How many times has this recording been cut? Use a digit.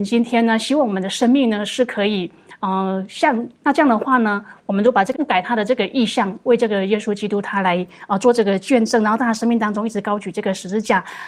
2